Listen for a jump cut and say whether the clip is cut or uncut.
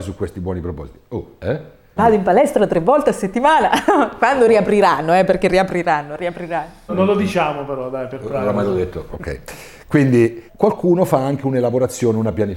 cut